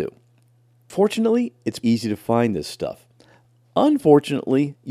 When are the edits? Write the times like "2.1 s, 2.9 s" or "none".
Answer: 1.8 s